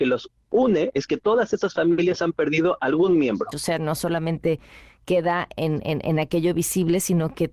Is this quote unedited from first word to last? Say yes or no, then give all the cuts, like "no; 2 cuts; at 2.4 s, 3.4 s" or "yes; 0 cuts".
no; 1 cut; at 3.5 s